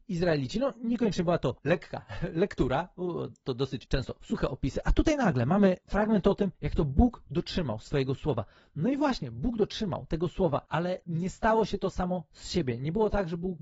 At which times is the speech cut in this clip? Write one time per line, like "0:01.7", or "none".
none

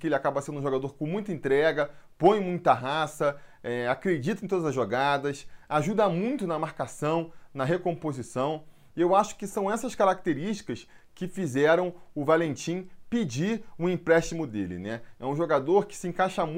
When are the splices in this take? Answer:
none

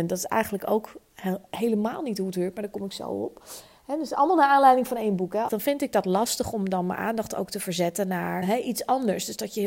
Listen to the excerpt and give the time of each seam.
0:05.5
0:08.4

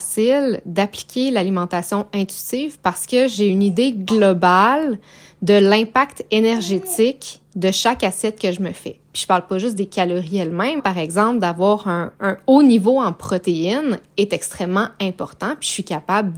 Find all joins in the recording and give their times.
0:10.8
0:12.1

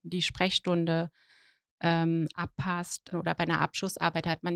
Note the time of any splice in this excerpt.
0:03.1

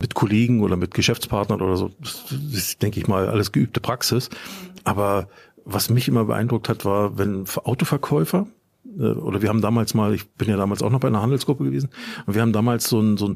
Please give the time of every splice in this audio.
none

